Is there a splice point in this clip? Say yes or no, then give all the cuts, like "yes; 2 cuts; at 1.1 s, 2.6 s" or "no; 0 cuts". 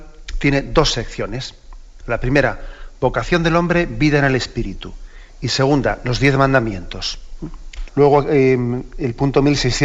yes; 1 cut; at 7.9 s